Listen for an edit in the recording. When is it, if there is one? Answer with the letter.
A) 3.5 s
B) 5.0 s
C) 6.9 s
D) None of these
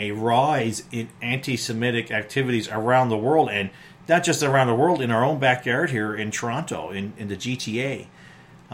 D